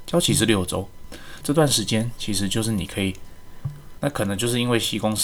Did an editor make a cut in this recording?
yes; 2 cuts; at 1.4 s, 4.0 s

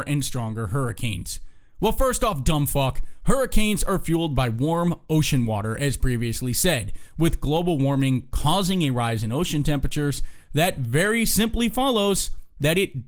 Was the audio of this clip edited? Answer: no; 0 cuts

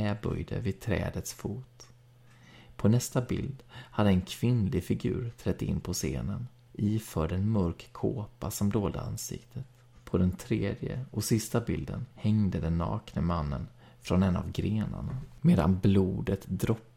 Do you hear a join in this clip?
yes; 2 cuts; at 10.0 s, 12.1 s

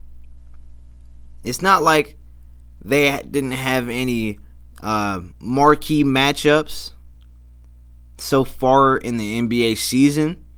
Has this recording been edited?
no; 0 cuts

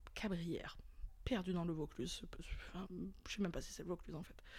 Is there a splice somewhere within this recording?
yes; 1 cut; at 2.8 s

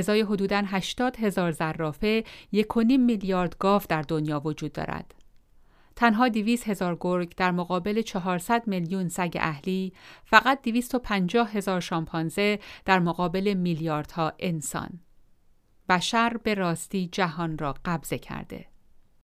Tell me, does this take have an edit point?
no; 0 cuts

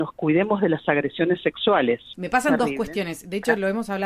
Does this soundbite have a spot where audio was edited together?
yes; 1 cut; at 2.1 s

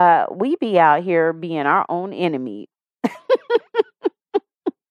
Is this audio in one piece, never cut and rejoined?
no; 1 cut; at 2.7 s

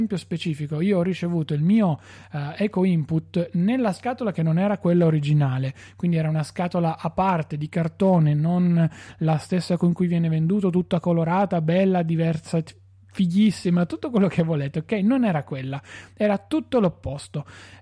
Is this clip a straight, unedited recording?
yes; 0 cuts

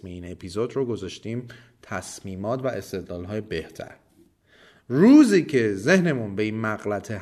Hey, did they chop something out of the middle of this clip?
no; 0 cuts

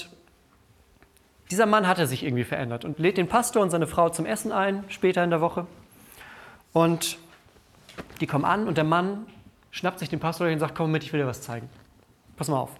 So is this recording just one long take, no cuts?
no; 1 cut; at 2.9 s

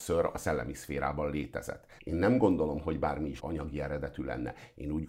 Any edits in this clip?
yes; 2 cuts; at 2.0 s, 3.4 s

